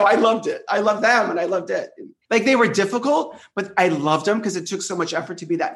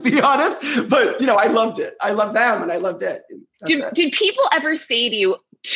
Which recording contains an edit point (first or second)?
first